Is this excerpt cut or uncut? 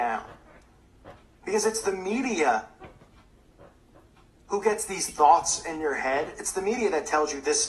uncut